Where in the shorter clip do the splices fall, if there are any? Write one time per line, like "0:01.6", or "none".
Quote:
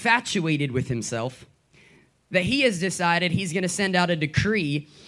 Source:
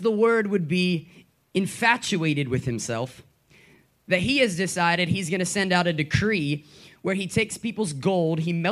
none